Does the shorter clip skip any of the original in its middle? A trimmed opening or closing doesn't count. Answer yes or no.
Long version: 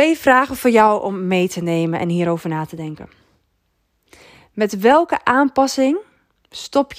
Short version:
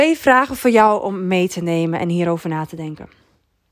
no